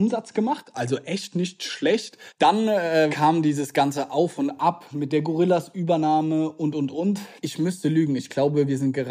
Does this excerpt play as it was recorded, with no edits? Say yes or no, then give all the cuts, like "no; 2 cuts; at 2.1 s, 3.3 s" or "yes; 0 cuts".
no; 1 cut; at 7.4 s